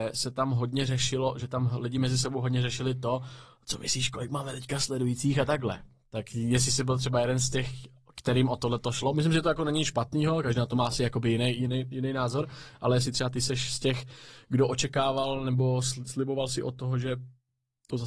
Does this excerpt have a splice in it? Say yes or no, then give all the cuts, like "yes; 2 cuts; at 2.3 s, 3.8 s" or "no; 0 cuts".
no; 0 cuts